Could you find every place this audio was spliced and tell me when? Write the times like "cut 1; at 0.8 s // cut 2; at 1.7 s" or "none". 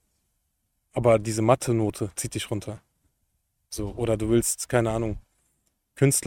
none